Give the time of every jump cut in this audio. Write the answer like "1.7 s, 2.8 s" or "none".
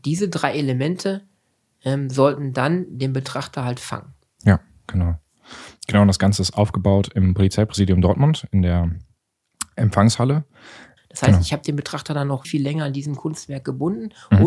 11.0 s, 12.4 s